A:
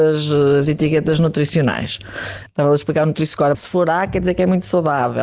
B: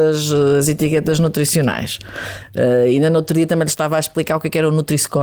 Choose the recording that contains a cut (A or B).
A